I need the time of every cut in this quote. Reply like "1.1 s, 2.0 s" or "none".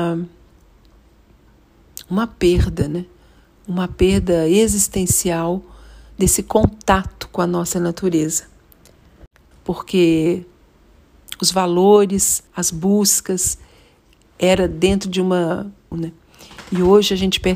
9.5 s, 12.5 s, 15.9 s